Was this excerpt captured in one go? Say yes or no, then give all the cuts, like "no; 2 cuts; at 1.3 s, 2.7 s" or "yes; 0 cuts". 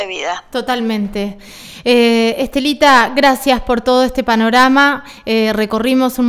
yes; 0 cuts